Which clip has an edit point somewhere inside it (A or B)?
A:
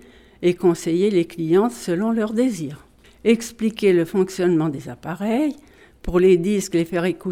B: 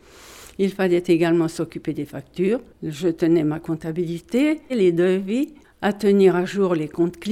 B